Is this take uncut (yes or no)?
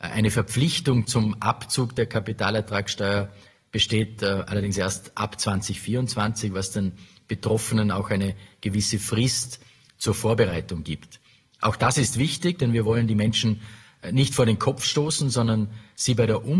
yes